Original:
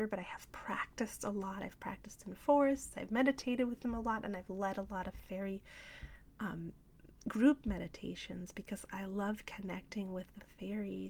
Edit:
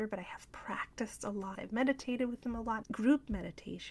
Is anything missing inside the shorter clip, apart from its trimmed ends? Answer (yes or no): yes